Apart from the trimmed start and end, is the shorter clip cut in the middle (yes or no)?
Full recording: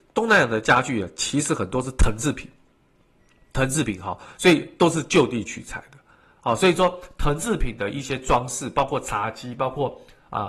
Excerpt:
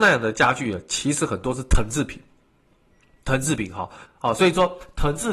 yes